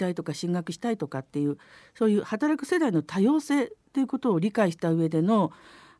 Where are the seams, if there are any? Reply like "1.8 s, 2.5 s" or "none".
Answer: none